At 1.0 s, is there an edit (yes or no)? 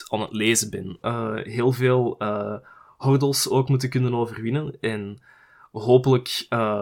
yes